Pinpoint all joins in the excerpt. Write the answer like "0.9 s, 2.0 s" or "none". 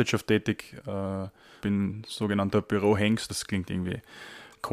1.6 s, 3.3 s